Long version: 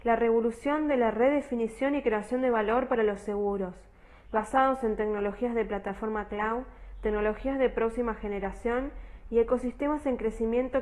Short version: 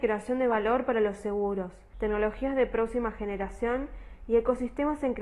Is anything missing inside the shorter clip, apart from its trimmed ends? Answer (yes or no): yes